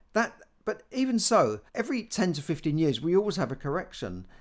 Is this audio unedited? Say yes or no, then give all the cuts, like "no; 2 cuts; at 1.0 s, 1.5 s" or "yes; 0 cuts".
no; 1 cut; at 1.7 s